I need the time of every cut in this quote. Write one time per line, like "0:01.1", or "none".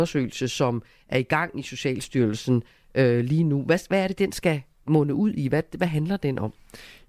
none